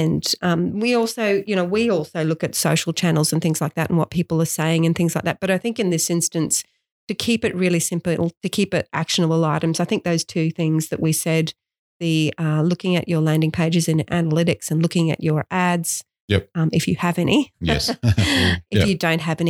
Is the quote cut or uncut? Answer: uncut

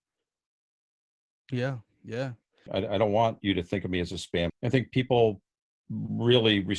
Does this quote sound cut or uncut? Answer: cut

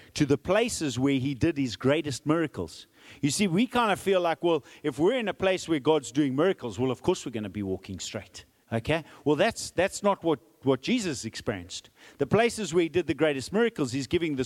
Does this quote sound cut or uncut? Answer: cut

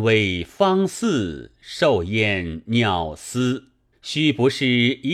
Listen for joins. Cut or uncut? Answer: cut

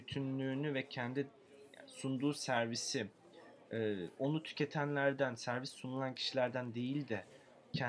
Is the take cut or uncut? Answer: uncut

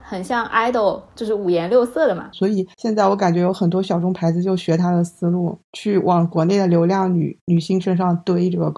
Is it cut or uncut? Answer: cut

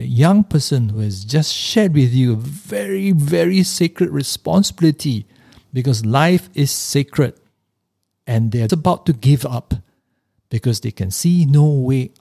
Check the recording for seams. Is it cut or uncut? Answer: cut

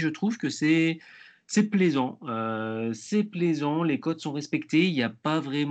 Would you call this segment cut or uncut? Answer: uncut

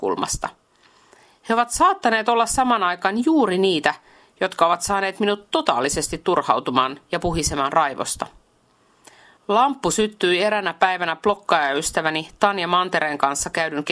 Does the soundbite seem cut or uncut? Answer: cut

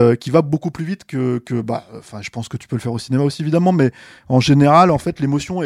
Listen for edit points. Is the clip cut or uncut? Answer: uncut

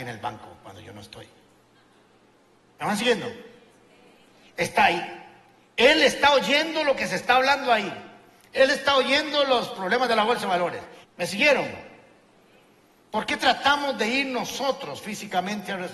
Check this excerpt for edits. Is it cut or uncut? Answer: cut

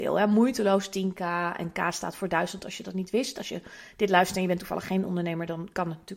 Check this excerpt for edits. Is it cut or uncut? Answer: uncut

